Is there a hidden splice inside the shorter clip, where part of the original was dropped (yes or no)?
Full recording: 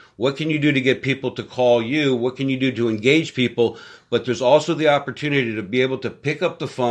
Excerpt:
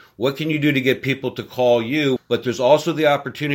yes